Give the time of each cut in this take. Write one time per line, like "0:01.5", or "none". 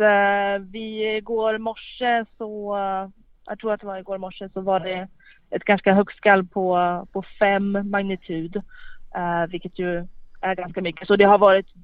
none